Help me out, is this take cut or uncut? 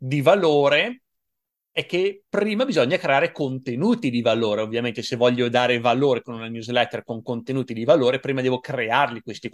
uncut